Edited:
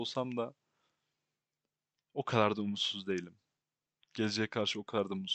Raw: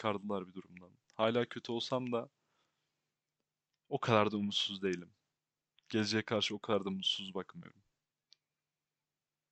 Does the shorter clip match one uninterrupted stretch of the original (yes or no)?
yes